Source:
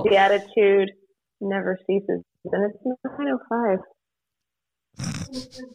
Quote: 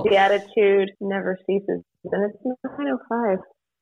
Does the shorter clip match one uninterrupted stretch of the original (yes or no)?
no